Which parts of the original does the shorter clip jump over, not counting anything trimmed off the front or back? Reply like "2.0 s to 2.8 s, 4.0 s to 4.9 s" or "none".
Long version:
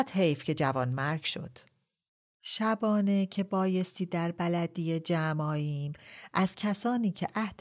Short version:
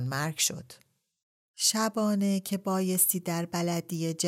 none